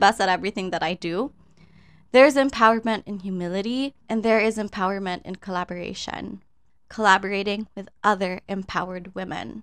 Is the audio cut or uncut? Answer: cut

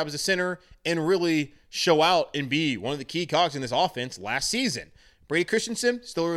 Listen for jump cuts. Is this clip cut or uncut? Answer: uncut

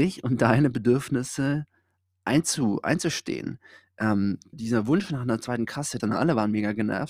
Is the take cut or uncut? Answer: cut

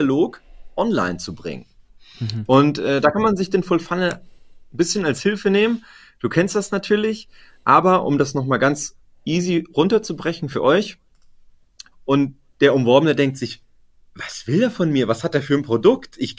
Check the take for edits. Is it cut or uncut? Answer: cut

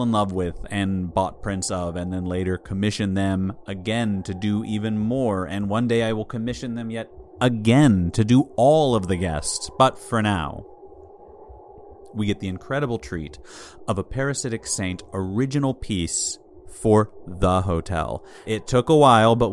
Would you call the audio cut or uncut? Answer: cut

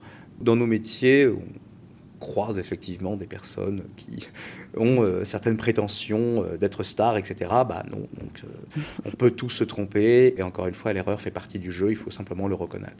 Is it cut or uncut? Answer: uncut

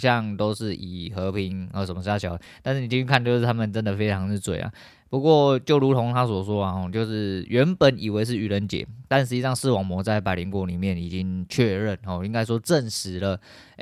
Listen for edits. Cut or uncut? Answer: uncut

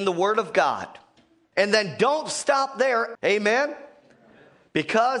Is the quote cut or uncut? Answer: cut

